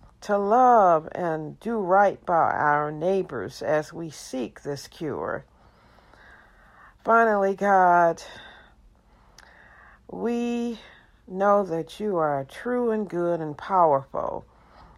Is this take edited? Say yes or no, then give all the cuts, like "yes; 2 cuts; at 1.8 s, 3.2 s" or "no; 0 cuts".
no; 0 cuts